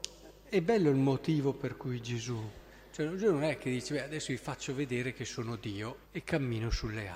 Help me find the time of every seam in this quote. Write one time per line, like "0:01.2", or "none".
0:06.0